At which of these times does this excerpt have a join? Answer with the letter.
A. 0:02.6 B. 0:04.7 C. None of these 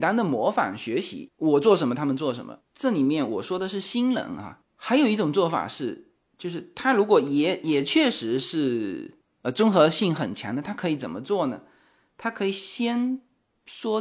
A